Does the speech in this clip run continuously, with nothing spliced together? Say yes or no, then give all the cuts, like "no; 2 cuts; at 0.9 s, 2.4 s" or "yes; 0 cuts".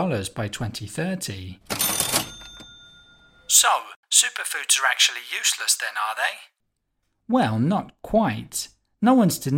yes; 0 cuts